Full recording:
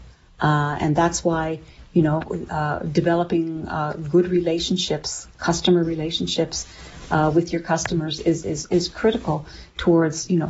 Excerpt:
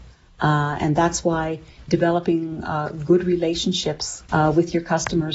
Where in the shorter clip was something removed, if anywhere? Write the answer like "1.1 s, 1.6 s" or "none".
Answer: 1.9 s, 4.3 s

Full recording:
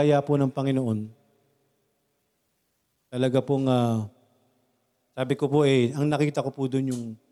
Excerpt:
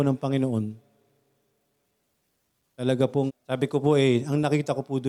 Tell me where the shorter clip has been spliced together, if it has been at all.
3.3 s

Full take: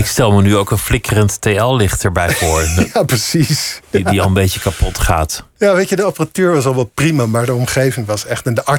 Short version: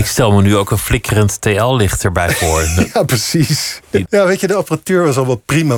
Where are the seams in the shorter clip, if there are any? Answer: 4.0 s

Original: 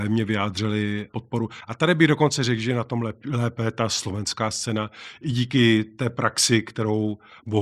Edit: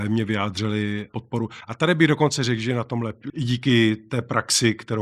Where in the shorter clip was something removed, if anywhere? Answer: 3.3 s

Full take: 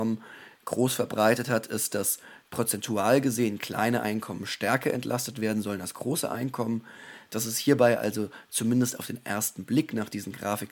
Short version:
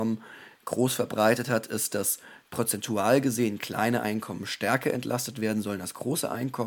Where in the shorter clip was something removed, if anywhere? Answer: none

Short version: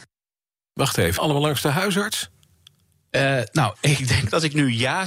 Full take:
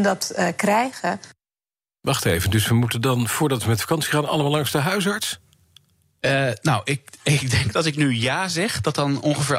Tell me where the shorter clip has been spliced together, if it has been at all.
1.2 s, 3.7 s

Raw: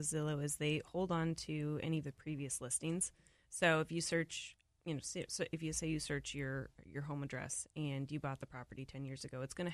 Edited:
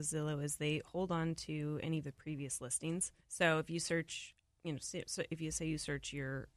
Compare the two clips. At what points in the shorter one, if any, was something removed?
3.2 s

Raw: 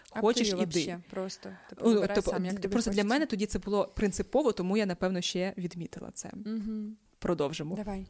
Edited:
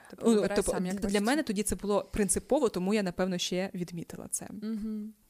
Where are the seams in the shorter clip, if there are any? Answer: 1.0 s

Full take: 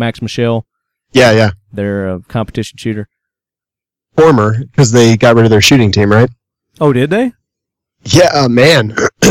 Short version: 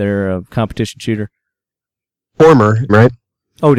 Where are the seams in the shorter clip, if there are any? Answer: 2.9 s

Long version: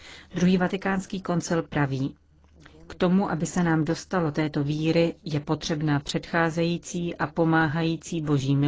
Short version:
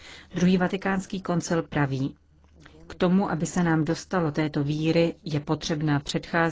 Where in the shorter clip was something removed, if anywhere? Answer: none

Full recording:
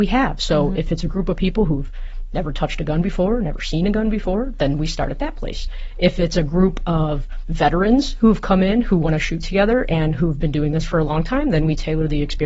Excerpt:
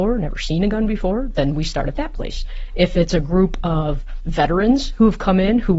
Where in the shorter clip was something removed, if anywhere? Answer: none

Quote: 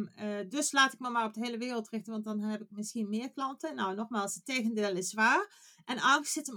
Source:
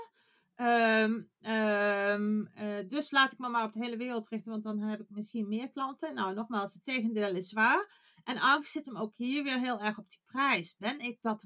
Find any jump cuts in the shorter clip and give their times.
none

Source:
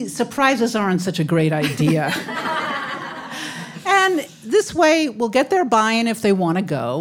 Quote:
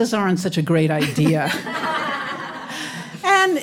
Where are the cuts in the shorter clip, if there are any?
none

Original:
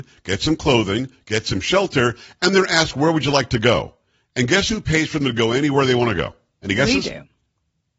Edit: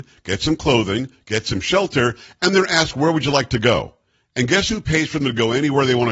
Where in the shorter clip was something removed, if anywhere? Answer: none

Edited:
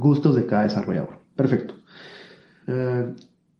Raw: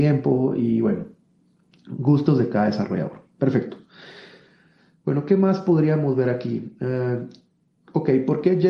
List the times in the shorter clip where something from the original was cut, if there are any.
2.6 s

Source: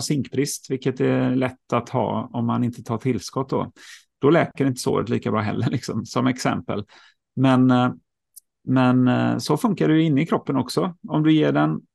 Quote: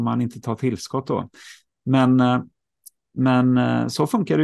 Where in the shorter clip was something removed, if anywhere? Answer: 1.7 s

